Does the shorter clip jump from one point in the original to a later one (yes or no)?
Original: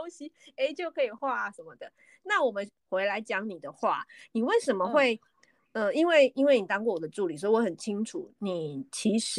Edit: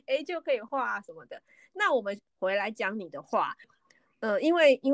yes